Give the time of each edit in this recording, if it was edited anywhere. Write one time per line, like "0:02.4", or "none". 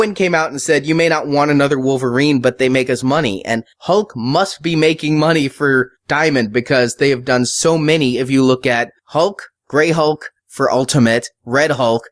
none

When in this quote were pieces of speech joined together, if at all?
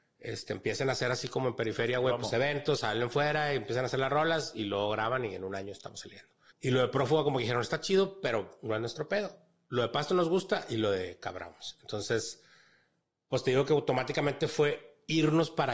0:06.5

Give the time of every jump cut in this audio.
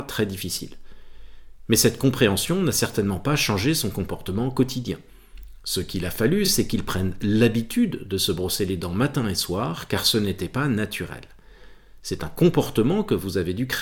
none

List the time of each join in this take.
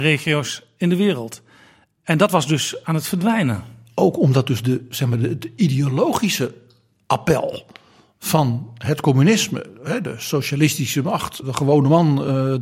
0:11.4

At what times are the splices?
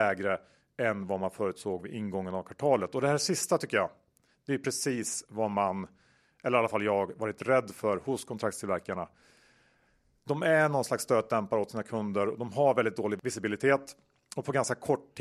none

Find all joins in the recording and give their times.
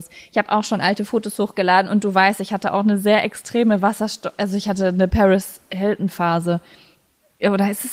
none

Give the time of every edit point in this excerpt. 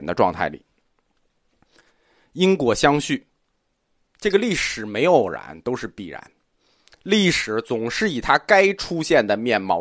none

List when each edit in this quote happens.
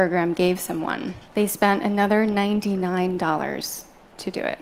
0:01.3

